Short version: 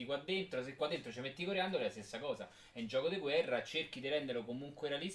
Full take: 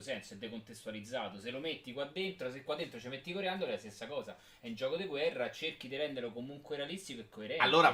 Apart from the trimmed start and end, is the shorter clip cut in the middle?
no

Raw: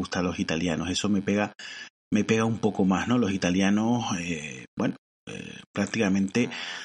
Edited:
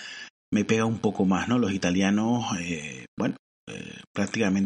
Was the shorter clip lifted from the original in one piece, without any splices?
yes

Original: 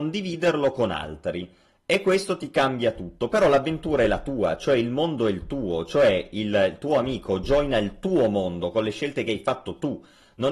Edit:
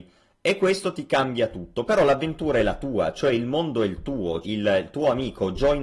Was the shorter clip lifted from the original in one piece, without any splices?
no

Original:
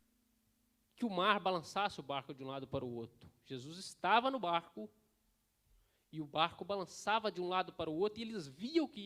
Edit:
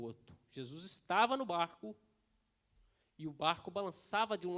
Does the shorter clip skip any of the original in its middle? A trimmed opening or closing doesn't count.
no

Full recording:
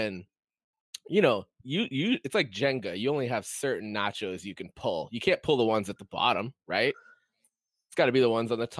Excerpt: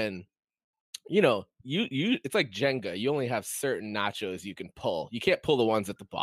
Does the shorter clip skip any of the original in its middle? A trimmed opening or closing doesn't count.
no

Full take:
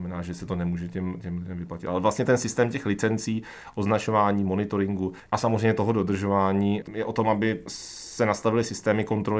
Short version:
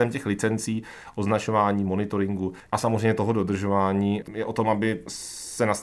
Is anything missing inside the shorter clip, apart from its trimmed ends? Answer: no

